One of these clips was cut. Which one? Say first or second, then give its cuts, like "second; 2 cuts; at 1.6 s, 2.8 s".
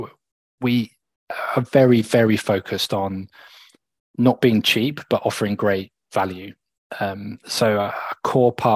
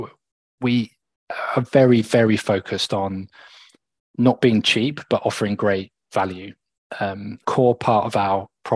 second; 1 cut; at 7.4 s